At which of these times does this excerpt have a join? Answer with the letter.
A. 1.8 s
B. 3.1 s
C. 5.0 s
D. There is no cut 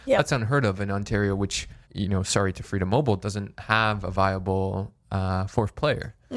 A